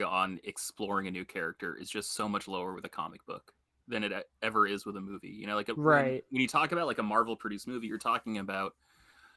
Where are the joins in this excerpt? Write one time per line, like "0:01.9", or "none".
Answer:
none